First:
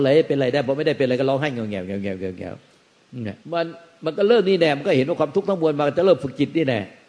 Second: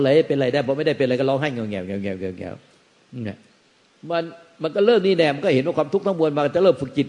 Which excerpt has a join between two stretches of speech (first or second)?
first